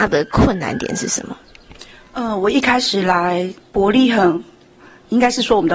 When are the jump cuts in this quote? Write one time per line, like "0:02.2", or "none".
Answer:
0:03.6

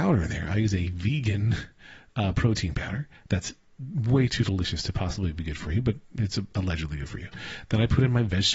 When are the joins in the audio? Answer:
none

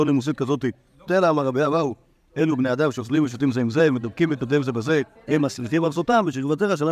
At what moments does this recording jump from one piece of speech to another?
0:01.1
0:05.2

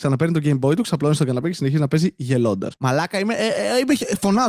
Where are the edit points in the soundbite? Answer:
0:02.7

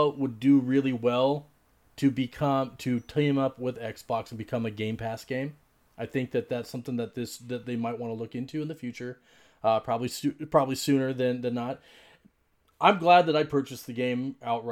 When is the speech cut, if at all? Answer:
none

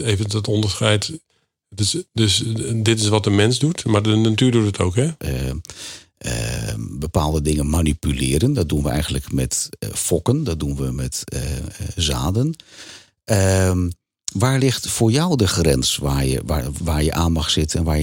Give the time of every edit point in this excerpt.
0:05.2

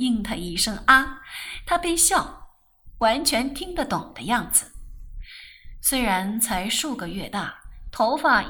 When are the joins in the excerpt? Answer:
none

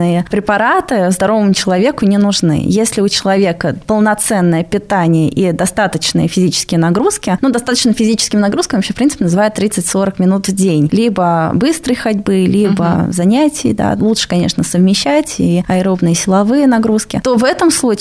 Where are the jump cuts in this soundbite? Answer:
none

